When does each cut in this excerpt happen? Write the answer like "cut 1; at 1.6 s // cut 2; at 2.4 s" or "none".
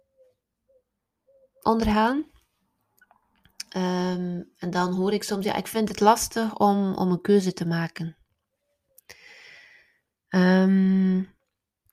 cut 1; at 10.1 s